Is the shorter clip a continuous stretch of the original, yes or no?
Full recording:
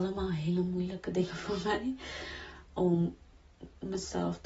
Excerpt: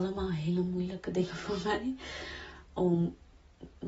yes